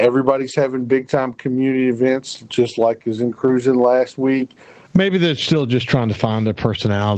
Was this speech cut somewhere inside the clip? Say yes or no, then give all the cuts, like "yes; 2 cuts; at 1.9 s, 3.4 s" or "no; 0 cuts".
yes; 1 cut; at 4.9 s